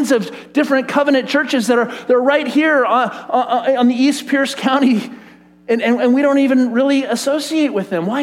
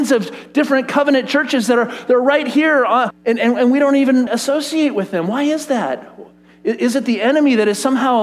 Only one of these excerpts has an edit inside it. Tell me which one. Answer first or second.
second